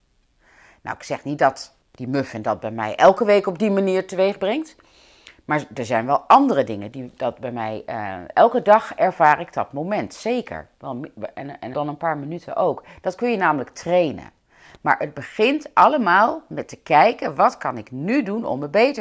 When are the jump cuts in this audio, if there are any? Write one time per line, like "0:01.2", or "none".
0:01.8
0:11.7